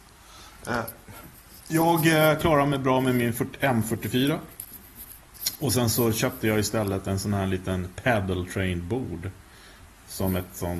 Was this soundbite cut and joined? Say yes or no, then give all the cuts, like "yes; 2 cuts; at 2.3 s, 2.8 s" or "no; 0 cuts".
no; 0 cuts